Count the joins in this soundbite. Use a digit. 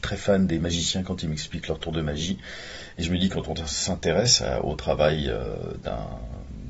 0